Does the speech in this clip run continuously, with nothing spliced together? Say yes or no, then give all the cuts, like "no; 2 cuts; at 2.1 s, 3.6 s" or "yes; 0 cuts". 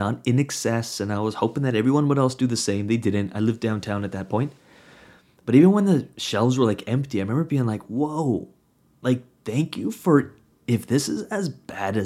yes; 0 cuts